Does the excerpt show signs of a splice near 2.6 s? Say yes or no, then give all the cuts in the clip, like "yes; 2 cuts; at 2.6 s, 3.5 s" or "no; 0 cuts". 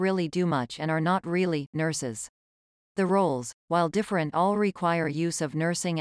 no; 0 cuts